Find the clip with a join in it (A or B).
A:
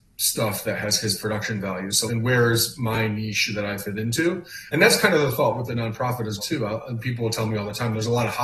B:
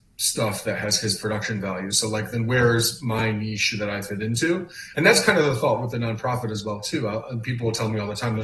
A